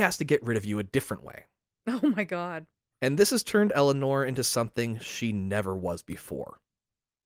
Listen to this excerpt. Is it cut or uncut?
cut